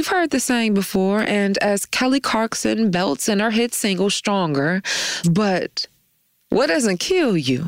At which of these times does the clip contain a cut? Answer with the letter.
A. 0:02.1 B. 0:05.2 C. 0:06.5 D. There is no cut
B